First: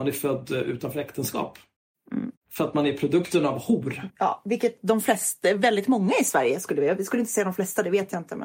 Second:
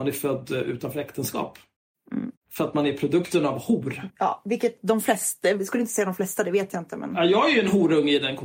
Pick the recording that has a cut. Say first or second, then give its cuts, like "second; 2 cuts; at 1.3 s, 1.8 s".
second; 1 cut; at 5.6 s